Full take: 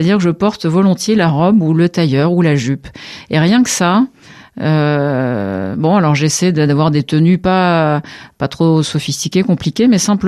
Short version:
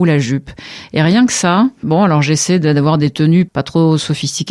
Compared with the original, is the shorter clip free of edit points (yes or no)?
no